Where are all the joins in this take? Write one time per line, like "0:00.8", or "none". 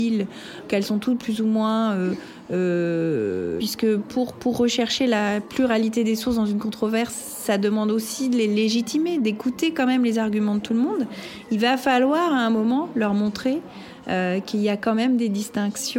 0:03.6